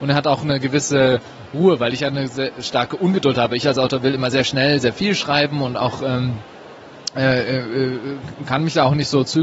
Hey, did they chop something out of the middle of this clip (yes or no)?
no